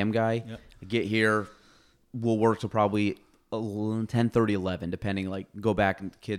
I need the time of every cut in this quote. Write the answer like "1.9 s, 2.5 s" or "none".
none